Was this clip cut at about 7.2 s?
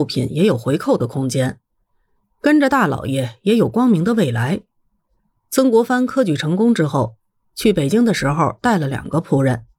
no; 1 cut; at 5.4 s

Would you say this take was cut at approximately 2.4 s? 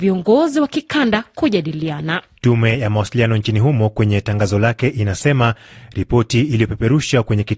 yes; 1 cut; at 2.4 s

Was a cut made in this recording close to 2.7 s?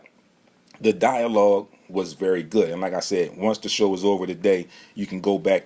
no; 0 cuts

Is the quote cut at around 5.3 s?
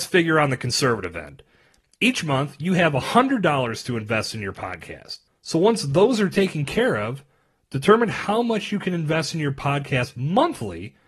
yes; 1 cut; at 5.3 s

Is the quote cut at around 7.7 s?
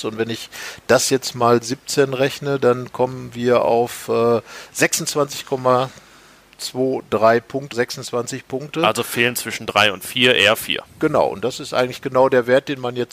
yes; 1 cut; at 7.7 s

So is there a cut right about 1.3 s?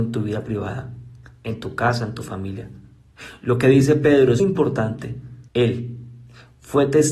no; 2 cuts; at 4.4 s, 5.5 s

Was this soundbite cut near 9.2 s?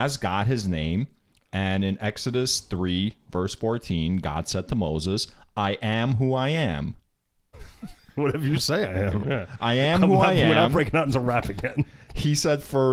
yes; 2 cuts; at 7.5 s, 9.2 s

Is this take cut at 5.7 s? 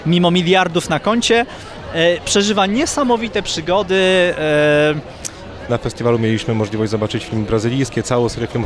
yes; 1 cut; at 5.7 s

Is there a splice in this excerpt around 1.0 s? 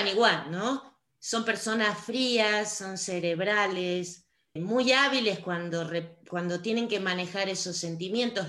no; 1 cut; at 4.6 s

